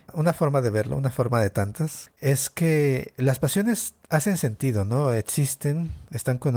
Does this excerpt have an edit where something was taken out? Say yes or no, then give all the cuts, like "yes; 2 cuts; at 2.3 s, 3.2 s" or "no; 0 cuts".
yes; 1 cut; at 2.1 s